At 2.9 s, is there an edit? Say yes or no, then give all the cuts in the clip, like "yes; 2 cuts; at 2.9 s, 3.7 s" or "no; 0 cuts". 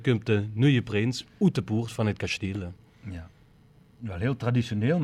no; 1 cut; at 1.3 s